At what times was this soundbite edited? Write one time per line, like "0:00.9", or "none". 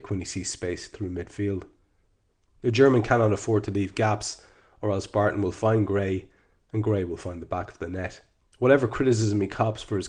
0:08.4

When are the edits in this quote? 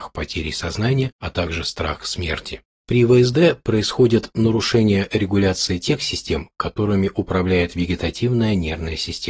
0:02.7

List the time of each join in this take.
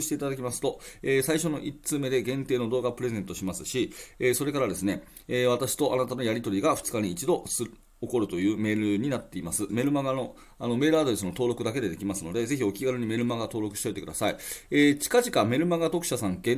0:09.7

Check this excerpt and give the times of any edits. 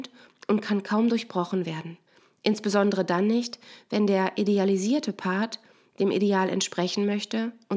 none

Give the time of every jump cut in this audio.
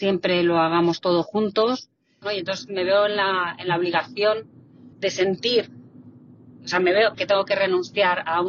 0:02.2
0:04.9
0:07.1

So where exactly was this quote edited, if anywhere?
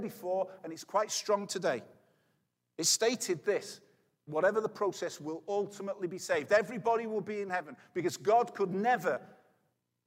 0:04.3

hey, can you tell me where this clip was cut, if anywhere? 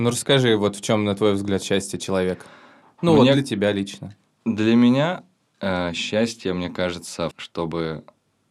0:07.3

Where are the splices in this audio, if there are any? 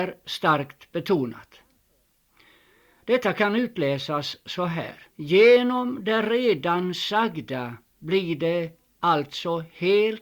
0:05.1

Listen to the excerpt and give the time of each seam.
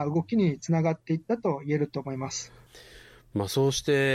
none

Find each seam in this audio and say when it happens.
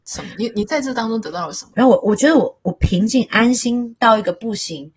0:01.7

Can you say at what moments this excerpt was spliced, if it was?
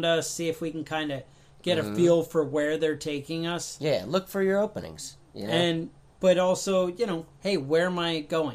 none

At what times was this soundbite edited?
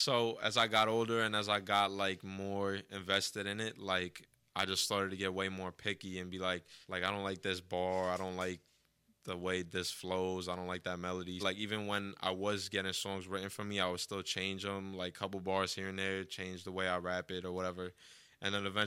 0:06.8
0:11.4

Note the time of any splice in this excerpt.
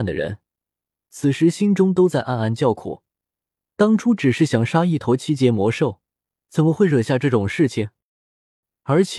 none

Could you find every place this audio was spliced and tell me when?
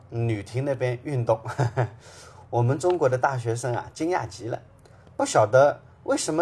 none

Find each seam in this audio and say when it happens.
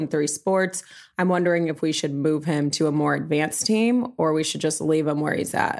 none

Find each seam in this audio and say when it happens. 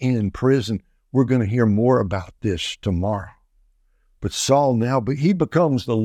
none

